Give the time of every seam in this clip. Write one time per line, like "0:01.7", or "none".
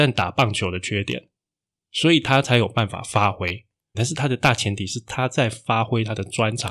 0:03.9